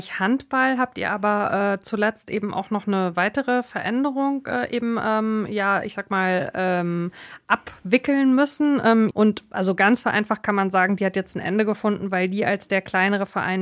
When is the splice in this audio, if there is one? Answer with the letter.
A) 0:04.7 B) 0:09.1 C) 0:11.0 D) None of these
B